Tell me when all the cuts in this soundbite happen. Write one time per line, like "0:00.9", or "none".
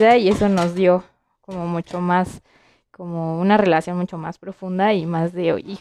none